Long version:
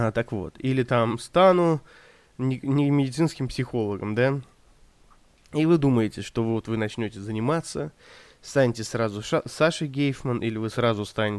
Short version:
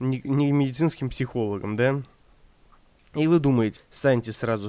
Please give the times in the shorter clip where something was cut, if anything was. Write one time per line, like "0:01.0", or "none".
0:03.8